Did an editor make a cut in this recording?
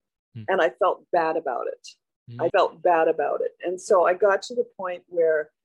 yes; 1 cut; at 2.5 s

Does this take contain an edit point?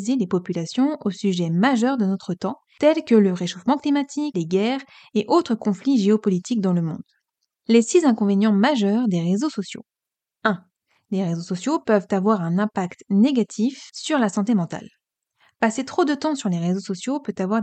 yes; 1 cut; at 4.3 s

